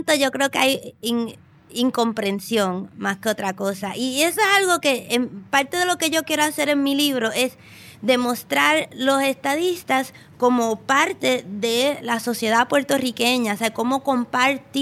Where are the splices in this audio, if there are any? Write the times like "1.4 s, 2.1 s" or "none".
none

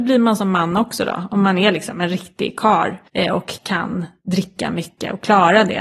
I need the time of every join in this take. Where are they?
3.1 s

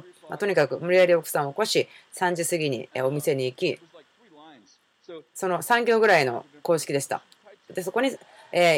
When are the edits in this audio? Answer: 7.7 s

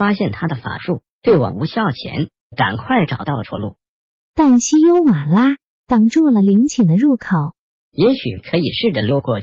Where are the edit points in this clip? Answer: none

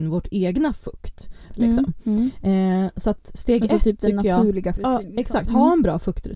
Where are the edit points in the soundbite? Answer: 1.5 s, 4.8 s

